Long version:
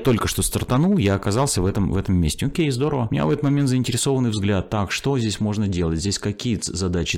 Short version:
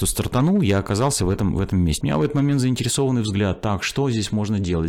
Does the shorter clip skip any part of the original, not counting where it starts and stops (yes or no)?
yes